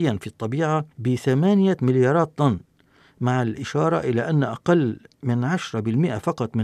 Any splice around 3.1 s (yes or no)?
no